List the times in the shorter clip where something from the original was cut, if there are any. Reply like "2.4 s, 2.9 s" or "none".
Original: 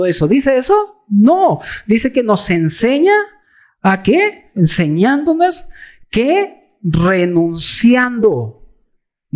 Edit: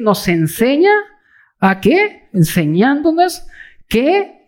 none